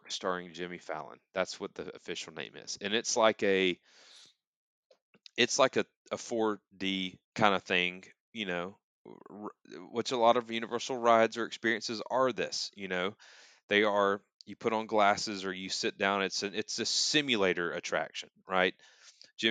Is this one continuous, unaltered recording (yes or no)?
no